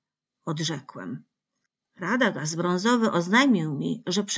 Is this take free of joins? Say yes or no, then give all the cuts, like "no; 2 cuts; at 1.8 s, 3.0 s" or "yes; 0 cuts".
yes; 0 cuts